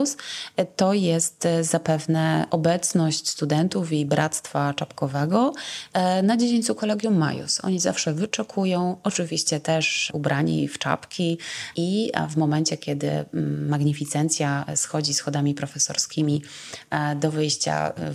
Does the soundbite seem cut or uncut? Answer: uncut